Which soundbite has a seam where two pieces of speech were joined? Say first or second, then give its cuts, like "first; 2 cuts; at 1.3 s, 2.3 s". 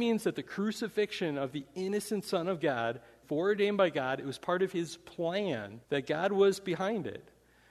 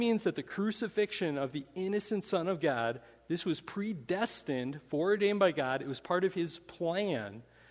first; 2 cuts; at 3.2 s, 5.8 s